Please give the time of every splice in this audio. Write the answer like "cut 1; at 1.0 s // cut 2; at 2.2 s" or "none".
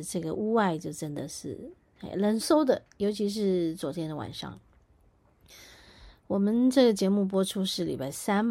cut 1; at 2.4 s